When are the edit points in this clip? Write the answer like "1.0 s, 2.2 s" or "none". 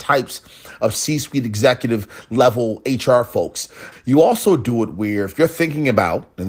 3.9 s

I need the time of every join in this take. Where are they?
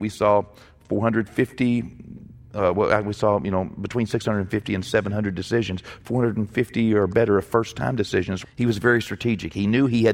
8.4 s

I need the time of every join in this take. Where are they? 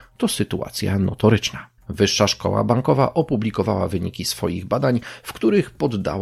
1.8 s

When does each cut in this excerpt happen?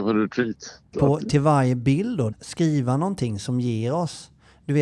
0.9 s, 2.3 s

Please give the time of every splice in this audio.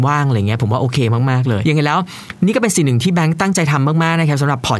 1.6 s

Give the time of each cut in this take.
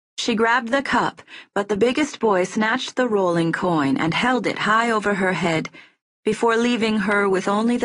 6.0 s

